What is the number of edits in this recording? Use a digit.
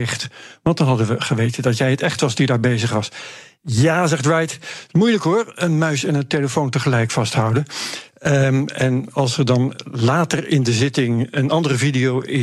0